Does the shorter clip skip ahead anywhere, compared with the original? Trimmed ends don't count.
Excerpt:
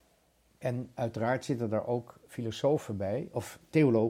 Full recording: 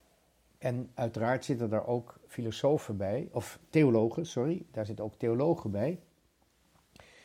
no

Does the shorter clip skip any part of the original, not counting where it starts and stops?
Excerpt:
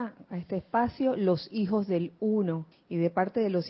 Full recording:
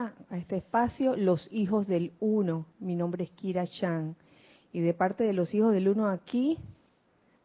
yes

